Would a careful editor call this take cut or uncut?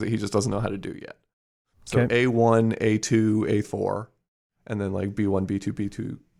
cut